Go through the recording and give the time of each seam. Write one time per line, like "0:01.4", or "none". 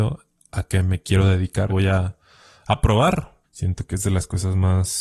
0:01.7
0:03.4